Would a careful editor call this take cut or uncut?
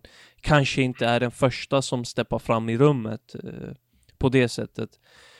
uncut